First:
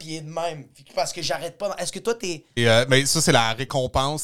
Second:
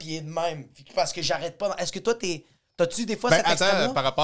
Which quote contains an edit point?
first; 1 cut; at 2.6 s

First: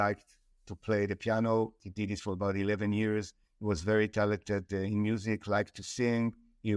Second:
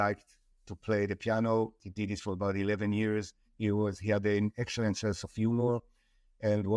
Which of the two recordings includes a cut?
second; 1 cut; at 3.5 s

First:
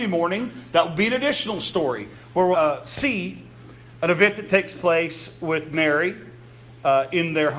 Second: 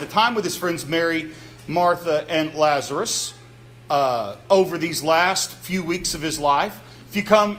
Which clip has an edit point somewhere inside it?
first; 1 cut; at 2.5 s

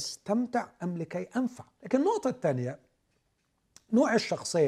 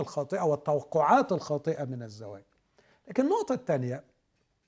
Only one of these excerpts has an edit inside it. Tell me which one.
first; 1 cut; at 1.8 s

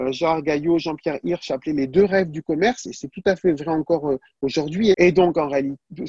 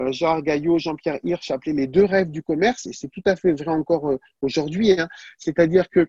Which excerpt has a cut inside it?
first; 1 cut; at 4.9 s

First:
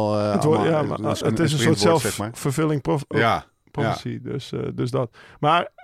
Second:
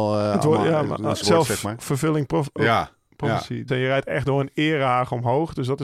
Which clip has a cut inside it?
second; 2 cuts; at 1.2 s, 3.7 s

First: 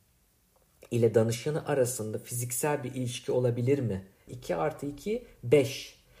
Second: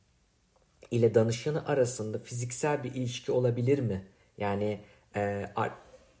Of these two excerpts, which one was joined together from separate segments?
first; 1 cut; at 4.3 s

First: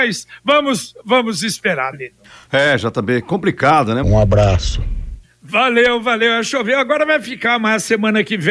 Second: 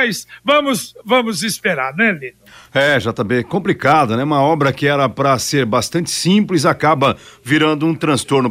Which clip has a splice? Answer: first; 2 cuts; at 1.9 s, 4.0 s

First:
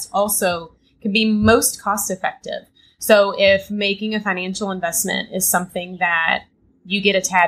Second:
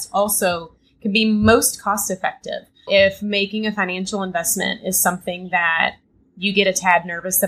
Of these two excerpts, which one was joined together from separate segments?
second; 1 cut; at 2.9 s

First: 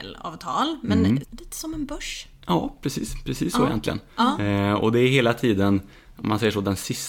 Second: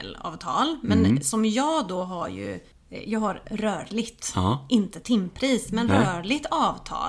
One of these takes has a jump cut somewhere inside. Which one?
first; 1 cut; at 1.2 s

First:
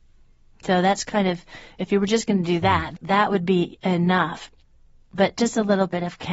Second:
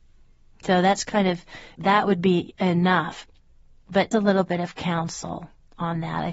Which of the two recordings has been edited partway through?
second; 2 cuts; at 1.8 s, 4.1 s

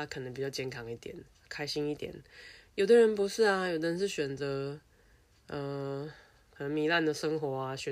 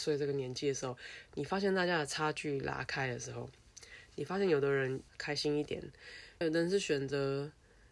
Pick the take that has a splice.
second; 2 cuts; at 5.1 s, 6.4 s

